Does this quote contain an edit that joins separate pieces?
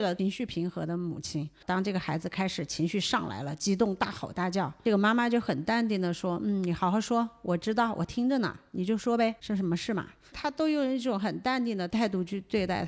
no; 0 cuts

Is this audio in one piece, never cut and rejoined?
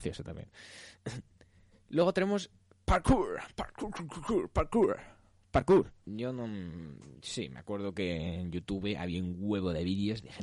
no; 1 cut; at 6.0 s

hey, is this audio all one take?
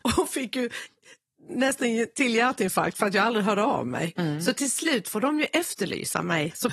yes; 0 cuts

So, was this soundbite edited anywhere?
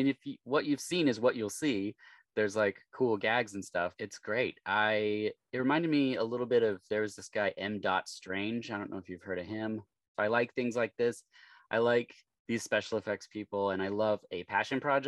yes; 1 cut; at 10.1 s

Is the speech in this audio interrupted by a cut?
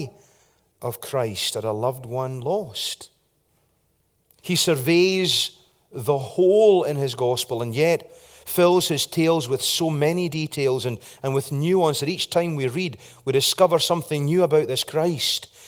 no; 0 cuts

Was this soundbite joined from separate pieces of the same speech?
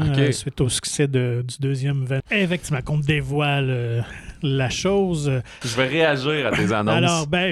yes; 2 cuts; at 2.2 s, 5.6 s

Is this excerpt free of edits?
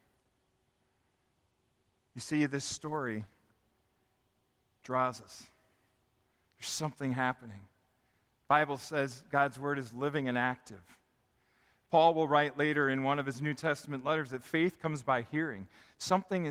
yes; 0 cuts

